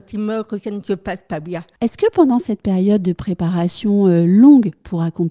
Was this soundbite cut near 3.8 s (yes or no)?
no